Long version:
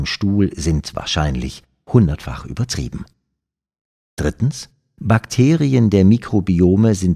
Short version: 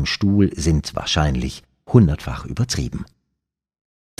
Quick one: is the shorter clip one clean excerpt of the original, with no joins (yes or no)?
yes